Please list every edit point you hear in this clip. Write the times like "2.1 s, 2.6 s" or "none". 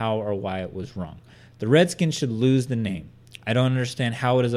none